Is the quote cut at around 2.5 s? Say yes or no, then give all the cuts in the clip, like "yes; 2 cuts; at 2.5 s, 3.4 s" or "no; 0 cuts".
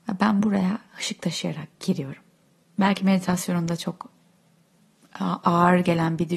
no; 0 cuts